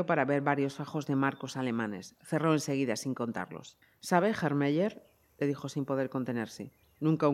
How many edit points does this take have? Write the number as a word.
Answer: zero